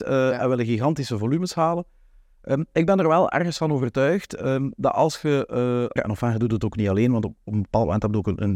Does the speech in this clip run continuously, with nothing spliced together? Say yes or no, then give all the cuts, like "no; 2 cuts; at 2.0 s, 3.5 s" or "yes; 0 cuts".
no; 1 cut; at 6.0 s